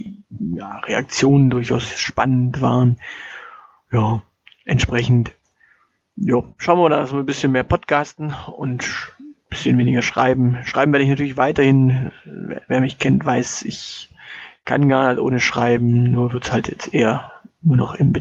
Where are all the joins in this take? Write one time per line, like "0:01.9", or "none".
none

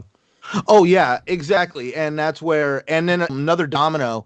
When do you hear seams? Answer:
0:03.3

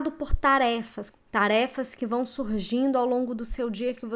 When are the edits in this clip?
0:01.1

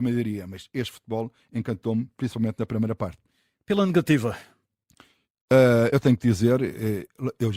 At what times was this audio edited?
none

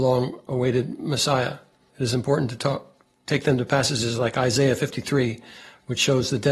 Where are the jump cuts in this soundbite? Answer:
0:01.9

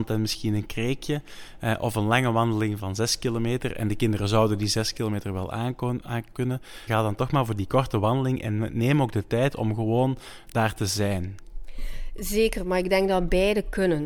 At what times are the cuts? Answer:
0:02.8
0:06.9

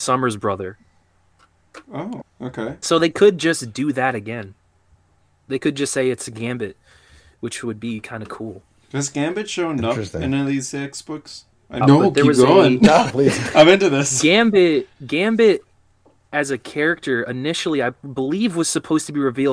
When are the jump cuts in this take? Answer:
0:02.2
0:11.8
0:13.1

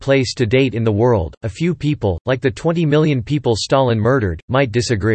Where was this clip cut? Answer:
none

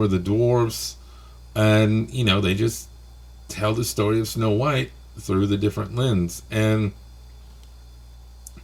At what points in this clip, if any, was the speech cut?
none

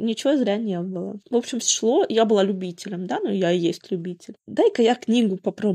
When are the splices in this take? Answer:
0:01.6
0:04.4

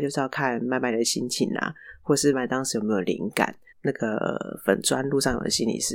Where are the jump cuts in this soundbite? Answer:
0:02.3
0:03.7

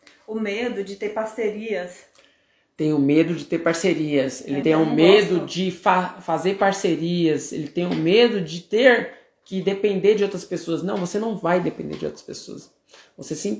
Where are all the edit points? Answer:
0:04.6

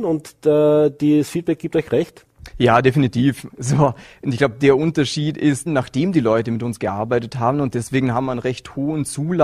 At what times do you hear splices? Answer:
0:03.5
0:05.7

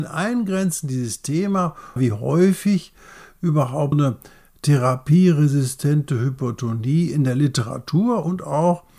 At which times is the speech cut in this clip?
0:02.0
0:03.9

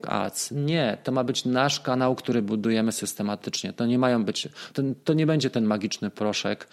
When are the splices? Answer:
0:04.7

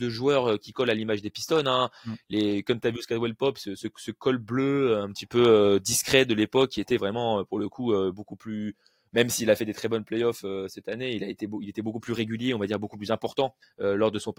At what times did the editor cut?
none

